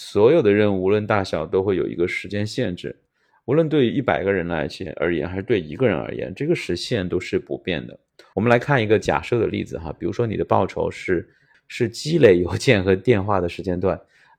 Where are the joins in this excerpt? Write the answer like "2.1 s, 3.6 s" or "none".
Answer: 8.3 s, 11.5 s